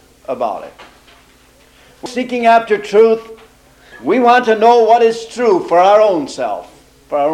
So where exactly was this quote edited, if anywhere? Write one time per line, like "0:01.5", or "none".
0:02.1
0:03.9